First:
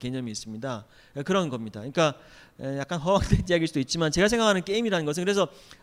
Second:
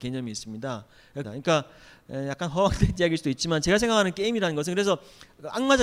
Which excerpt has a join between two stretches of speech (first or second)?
second